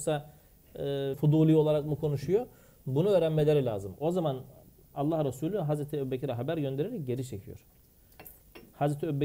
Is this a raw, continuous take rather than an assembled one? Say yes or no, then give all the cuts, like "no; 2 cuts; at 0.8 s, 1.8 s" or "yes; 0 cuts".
no; 1 cut; at 1.1 s